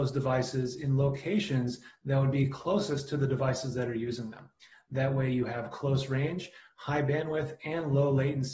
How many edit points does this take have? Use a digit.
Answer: 0